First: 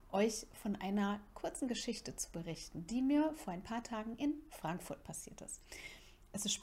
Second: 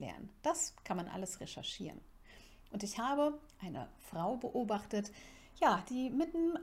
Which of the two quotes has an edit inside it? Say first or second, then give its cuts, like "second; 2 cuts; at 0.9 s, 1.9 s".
second; 1 cut; at 2.6 s